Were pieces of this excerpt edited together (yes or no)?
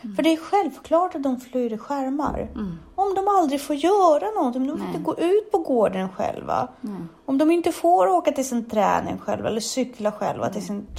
no